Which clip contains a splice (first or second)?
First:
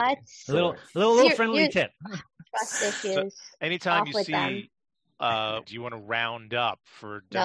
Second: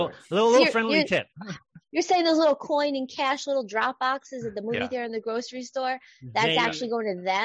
first